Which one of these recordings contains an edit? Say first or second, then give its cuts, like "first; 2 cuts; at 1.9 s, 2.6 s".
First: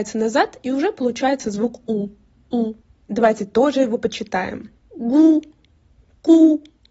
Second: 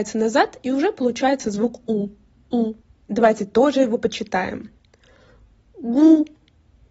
first; 1 cut; at 4.8 s